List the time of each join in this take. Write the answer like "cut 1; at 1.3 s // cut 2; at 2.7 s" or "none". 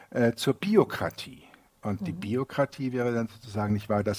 none